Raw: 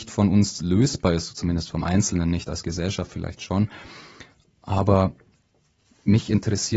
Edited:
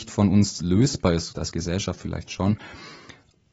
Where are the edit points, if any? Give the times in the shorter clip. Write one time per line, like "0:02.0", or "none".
0:01.3